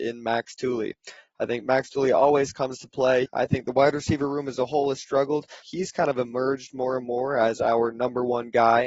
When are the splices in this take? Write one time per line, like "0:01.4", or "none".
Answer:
0:03.3
0:05.6